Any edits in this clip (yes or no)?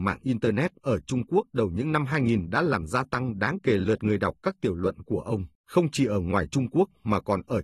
yes